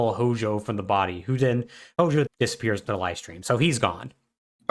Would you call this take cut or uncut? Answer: cut